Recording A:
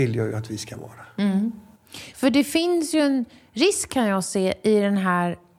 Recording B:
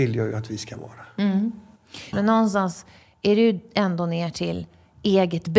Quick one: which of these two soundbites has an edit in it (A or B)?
B